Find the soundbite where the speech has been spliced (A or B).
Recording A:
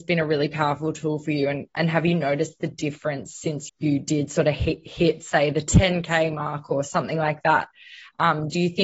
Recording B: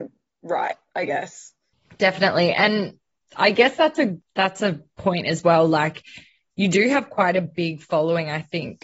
A